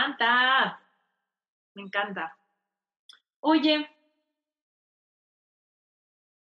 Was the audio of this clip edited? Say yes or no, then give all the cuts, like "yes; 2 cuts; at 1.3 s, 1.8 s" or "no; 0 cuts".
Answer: no; 0 cuts